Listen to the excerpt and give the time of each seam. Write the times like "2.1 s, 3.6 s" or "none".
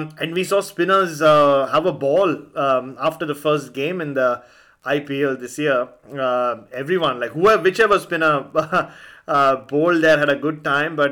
none